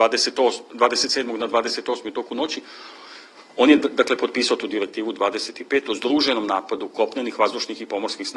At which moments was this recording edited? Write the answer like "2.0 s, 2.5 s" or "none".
none